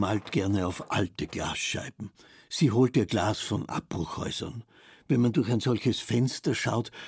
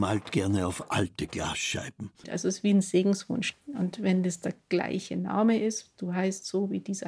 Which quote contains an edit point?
second; 1 cut; at 2.2 s

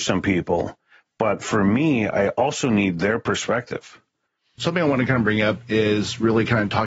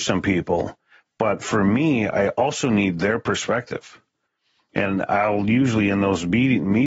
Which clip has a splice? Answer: first; 1 cut; at 4.6 s

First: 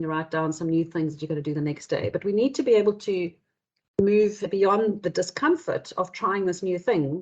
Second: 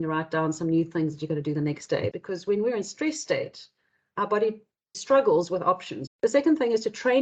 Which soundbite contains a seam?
second; 2 cuts; at 2.1 s, 6.1 s

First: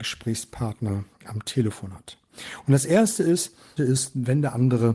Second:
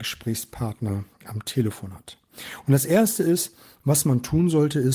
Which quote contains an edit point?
first; 1 cut; at 3.8 s

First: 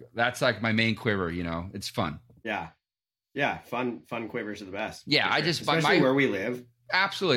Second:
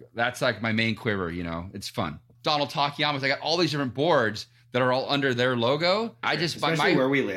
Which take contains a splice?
second; 2 cuts; at 2.3 s, 6.2 s

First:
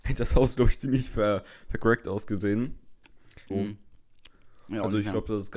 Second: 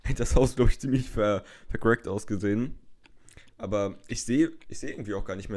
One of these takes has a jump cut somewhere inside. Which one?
first; 1 cut; at 3.5 s

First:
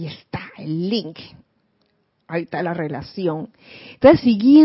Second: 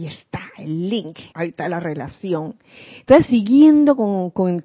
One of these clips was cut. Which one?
second; 1 cut; at 1.3 s

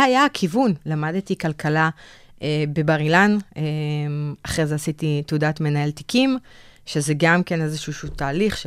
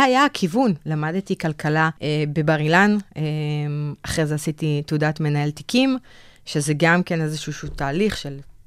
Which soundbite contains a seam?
second; 1 cut; at 2.0 s

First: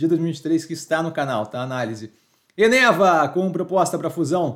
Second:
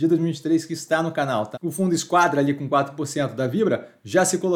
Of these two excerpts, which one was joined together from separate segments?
second; 1 cut; at 1.5 s

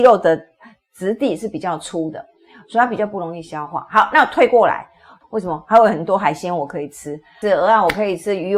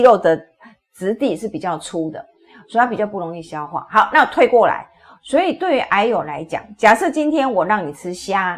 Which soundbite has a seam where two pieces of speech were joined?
first; 2 cuts; at 5.2 s, 7.4 s

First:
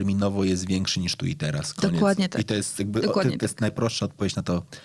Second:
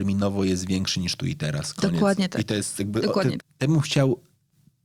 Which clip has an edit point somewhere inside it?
second; 1 cut; at 3.4 s

